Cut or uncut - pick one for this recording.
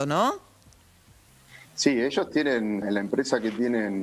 cut